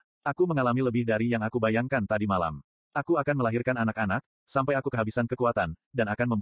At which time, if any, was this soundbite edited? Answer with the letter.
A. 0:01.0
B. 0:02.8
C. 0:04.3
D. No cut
B